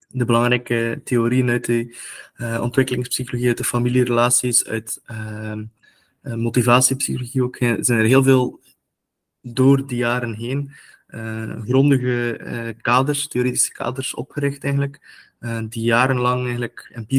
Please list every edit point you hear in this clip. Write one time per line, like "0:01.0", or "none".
none